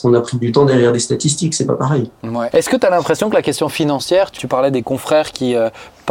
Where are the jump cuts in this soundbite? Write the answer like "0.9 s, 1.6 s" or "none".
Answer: 2.5 s, 4.4 s